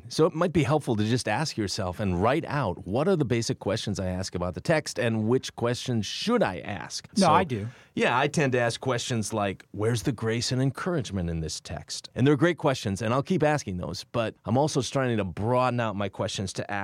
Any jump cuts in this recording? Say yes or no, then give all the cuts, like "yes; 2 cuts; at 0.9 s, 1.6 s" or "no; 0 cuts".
yes; 2 cuts; at 7.1 s, 12.1 s